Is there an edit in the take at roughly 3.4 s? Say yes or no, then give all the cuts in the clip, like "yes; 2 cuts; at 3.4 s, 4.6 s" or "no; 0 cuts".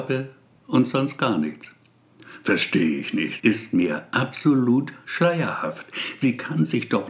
yes; 1 cut; at 3.4 s